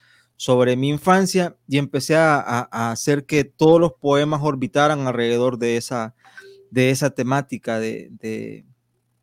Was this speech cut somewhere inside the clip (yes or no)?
no